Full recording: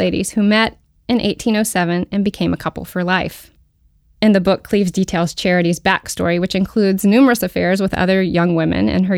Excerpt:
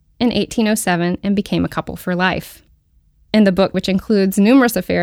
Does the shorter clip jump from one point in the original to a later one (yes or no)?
yes